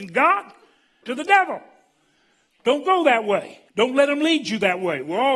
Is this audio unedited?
no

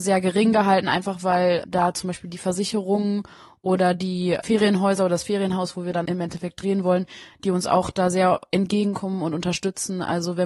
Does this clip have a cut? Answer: no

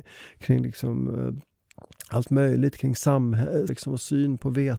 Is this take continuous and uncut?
no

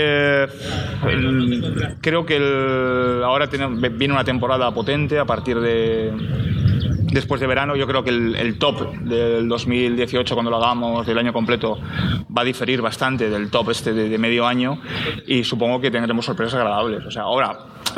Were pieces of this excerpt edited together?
no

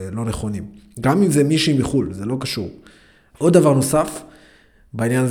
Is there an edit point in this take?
yes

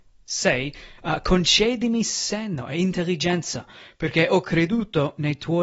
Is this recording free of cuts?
yes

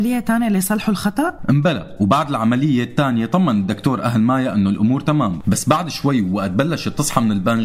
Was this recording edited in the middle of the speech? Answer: no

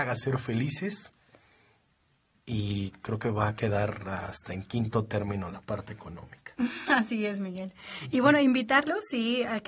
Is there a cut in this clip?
no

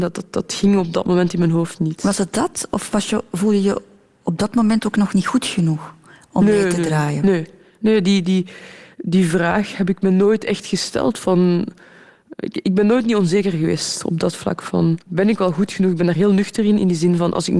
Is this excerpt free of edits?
no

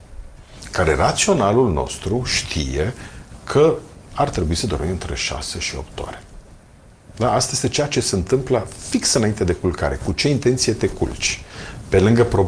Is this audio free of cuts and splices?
yes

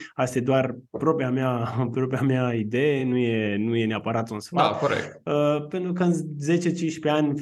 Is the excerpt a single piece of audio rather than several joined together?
yes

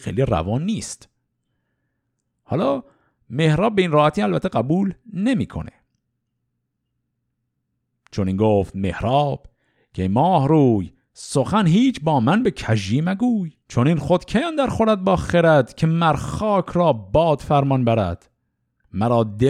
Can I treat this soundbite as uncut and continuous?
no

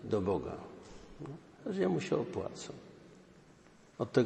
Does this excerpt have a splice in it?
yes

